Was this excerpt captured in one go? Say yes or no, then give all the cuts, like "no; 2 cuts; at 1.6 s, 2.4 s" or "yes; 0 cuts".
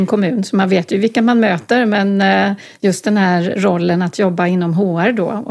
yes; 0 cuts